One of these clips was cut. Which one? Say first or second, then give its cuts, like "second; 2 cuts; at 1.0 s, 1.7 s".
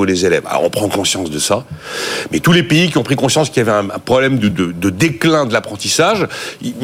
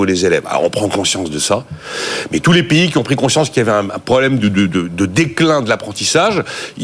first; 1 cut; at 4.5 s